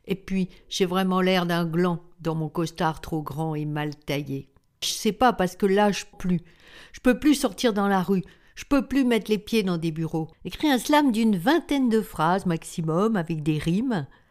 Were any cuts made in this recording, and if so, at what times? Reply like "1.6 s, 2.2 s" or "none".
4.8 s, 6.1 s, 10.3 s